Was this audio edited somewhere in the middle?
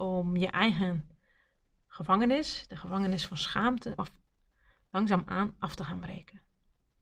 yes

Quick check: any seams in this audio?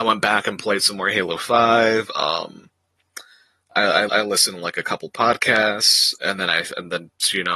yes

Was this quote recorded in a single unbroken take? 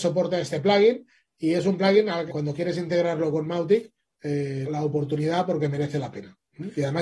no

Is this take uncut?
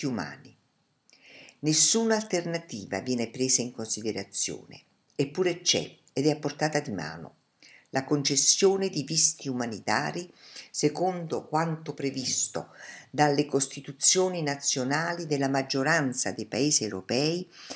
yes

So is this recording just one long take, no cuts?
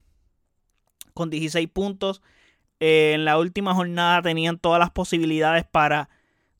no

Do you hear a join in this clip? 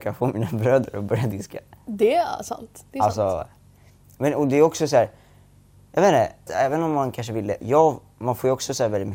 yes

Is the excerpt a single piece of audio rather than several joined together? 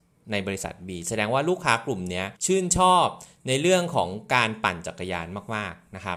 no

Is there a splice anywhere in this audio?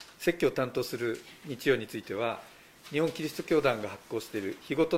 no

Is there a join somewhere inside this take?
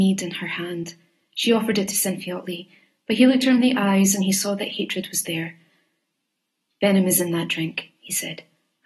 no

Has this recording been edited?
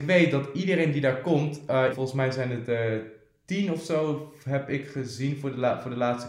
yes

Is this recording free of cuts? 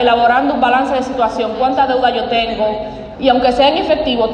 no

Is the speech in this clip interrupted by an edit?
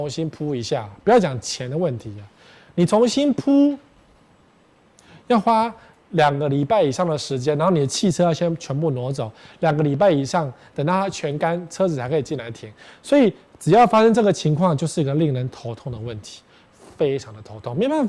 no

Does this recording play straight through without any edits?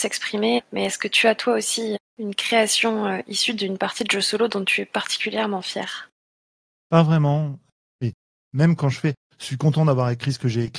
no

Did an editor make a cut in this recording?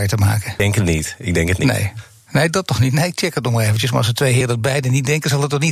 no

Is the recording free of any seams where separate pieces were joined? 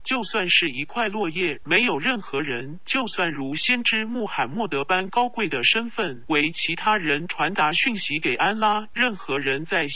no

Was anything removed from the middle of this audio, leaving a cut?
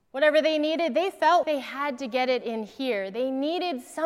yes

